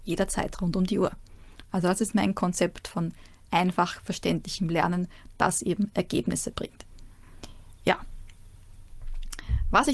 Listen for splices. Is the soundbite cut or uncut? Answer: uncut